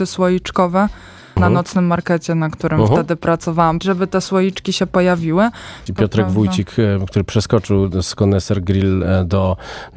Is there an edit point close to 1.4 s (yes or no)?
yes